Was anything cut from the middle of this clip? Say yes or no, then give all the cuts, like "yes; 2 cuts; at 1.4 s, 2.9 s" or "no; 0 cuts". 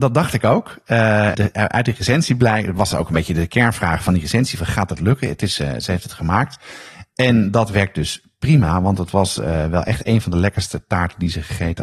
yes; 1 cut; at 1.3 s